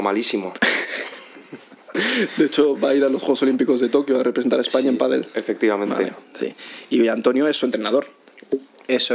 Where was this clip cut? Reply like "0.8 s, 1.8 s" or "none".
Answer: none